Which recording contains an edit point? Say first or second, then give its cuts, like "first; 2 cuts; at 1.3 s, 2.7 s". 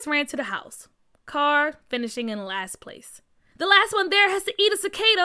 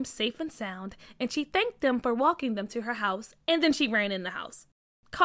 first; 1 cut; at 3.5 s